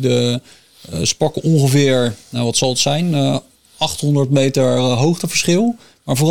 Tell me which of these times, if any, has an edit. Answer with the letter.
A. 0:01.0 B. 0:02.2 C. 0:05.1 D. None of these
B